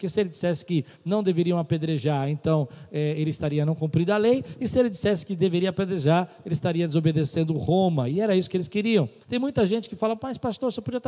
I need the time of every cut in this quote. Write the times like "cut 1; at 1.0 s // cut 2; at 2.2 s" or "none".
cut 1; at 9.2 s